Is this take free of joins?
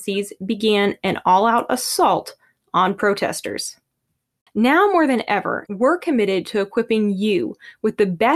no; 2 cuts; at 4.5 s, 5.7 s

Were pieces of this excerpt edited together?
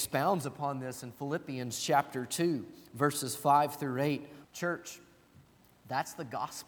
yes; 1 cut; at 4.4 s

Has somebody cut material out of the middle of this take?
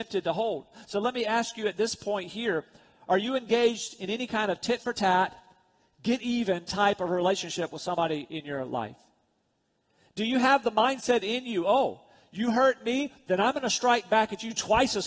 no; 0 cuts

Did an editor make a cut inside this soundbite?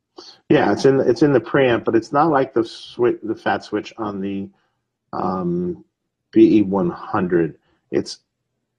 no; 0 cuts

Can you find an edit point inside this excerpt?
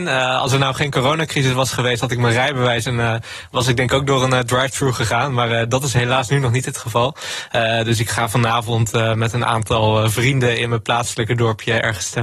no; 0 cuts

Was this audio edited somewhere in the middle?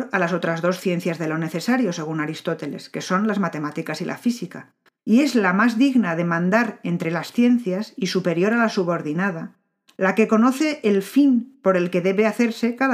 yes; 1 cut; at 5.0 s

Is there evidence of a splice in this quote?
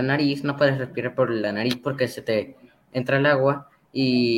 no; 0 cuts

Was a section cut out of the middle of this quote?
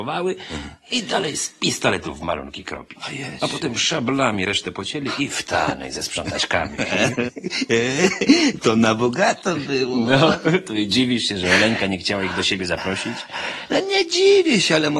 no; 0 cuts

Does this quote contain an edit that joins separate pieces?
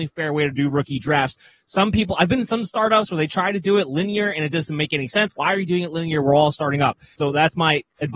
yes; 2 cuts; at 5.4 s, 7.2 s

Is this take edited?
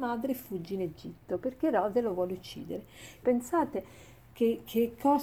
yes; 1 cut; at 3.2 s

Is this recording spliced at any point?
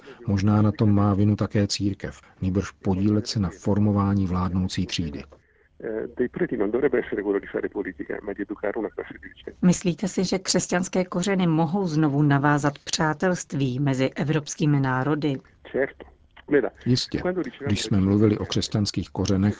yes; 1 cut; at 2.2 s

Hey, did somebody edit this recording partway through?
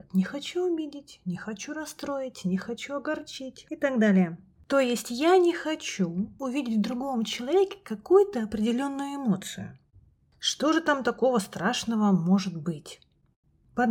no; 0 cuts

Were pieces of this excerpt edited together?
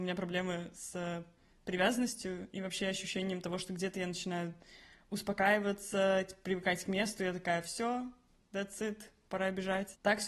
no; 0 cuts

